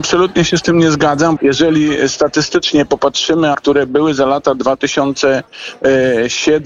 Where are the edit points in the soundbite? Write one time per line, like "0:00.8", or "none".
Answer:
0:01.4
0:03.5